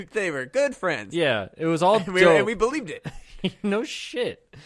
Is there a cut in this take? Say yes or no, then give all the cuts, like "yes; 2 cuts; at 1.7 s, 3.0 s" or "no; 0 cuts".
no; 0 cuts